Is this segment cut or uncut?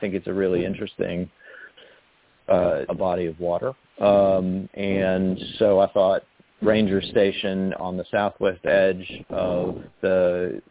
cut